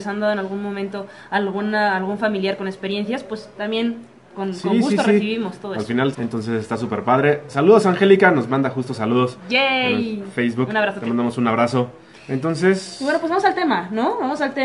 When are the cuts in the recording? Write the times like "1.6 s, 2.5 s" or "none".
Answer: 6.1 s